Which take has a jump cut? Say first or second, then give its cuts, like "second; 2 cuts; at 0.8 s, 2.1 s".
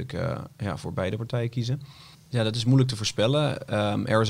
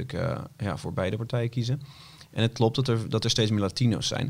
first; 1 cut; at 2.1 s